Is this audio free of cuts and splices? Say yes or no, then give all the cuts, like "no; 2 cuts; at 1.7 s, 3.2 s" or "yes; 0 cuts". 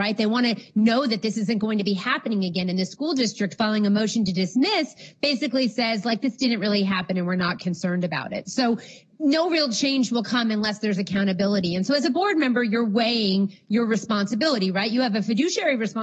yes; 0 cuts